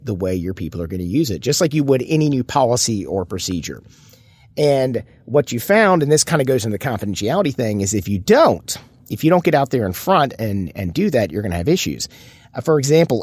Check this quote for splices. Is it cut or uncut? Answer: uncut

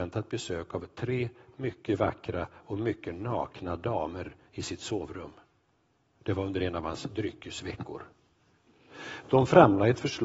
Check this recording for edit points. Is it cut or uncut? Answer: uncut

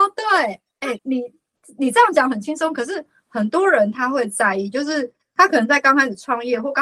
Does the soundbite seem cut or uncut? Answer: cut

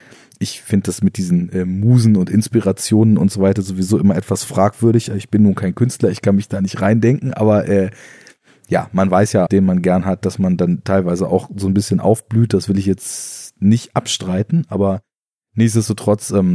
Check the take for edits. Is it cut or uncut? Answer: cut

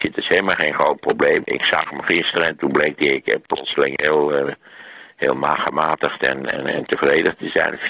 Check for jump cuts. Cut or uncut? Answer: uncut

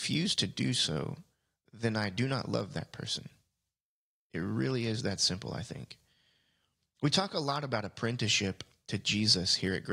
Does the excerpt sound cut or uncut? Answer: uncut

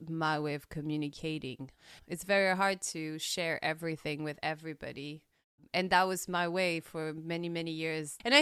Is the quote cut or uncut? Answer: cut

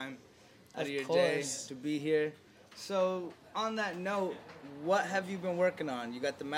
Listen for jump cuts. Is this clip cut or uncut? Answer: uncut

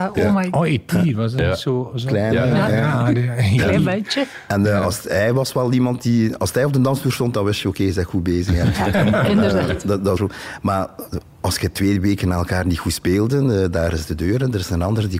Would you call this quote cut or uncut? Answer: cut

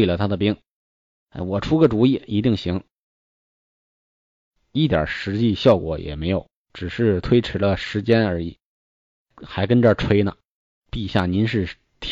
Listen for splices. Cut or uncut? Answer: uncut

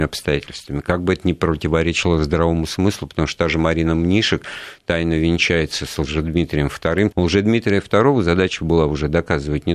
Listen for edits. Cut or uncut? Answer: cut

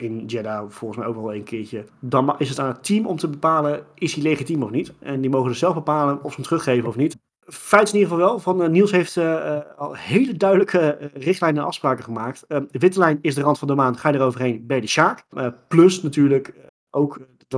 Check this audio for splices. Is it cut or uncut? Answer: cut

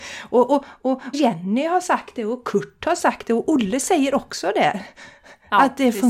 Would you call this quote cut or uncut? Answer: cut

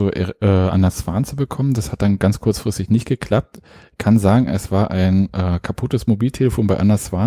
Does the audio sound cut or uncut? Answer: uncut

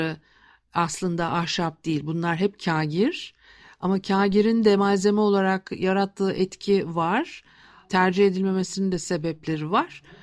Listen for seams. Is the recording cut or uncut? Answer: uncut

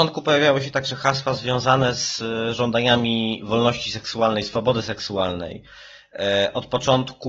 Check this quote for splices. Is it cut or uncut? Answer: uncut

